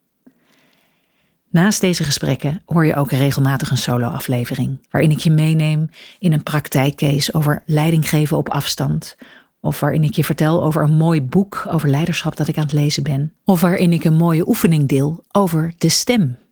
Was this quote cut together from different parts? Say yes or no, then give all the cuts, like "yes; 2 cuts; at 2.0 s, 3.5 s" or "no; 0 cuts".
yes; 2 cuts; at 4.9 s, 13.4 s